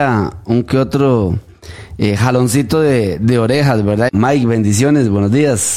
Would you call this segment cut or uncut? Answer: cut